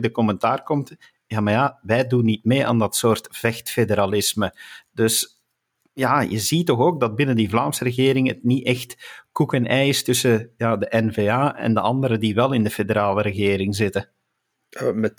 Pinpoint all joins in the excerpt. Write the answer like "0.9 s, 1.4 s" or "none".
none

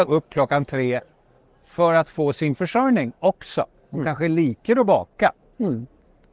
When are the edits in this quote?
none

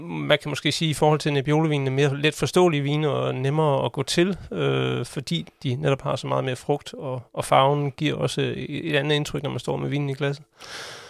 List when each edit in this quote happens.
none

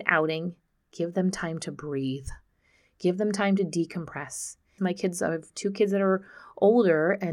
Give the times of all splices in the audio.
4.8 s

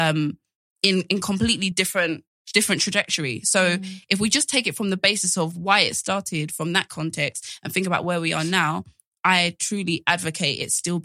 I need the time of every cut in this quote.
none

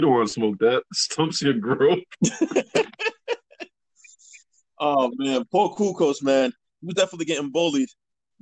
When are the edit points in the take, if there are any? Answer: none

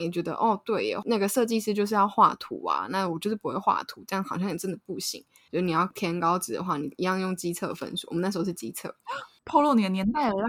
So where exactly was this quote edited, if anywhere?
5.5 s

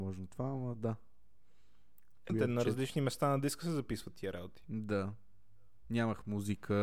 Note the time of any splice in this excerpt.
2.3 s

